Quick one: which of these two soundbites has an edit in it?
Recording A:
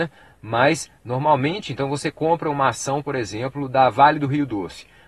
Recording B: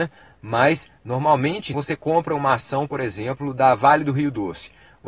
B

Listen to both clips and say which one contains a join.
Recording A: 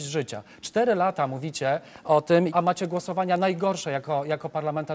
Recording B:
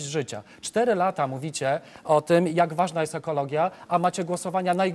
A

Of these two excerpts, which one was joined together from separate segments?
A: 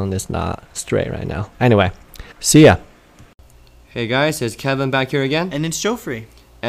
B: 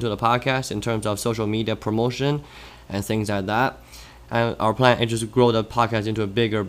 A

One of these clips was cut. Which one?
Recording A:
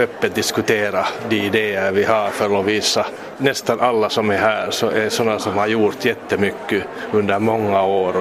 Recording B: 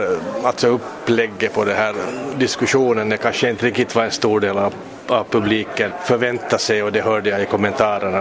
A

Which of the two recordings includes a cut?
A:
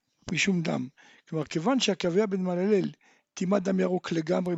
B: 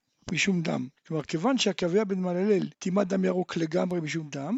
B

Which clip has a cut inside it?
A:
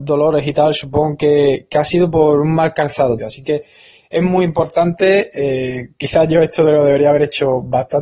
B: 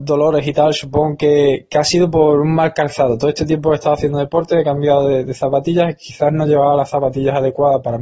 A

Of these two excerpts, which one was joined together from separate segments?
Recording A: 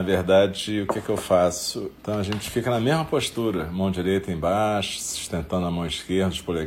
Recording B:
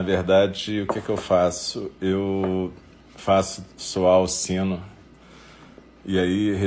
A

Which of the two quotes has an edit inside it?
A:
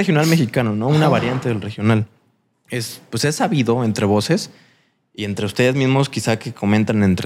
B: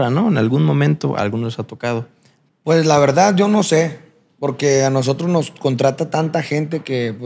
B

